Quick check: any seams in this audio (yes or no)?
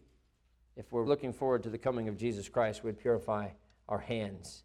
yes